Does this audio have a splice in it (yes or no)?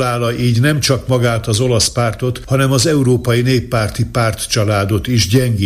no